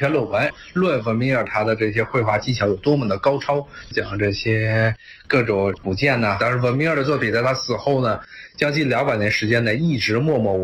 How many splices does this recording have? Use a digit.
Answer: 2